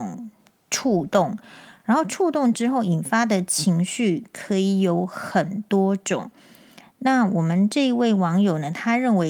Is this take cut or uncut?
uncut